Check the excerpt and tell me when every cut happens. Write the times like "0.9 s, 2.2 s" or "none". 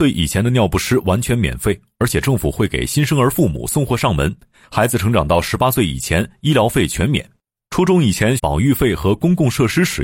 8.4 s